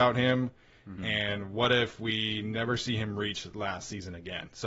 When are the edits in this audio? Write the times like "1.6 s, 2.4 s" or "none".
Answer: 1.0 s